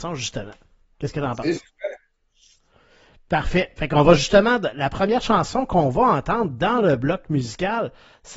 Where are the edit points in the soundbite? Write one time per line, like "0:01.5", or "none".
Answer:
none